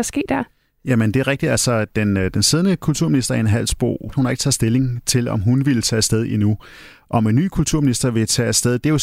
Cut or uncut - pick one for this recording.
cut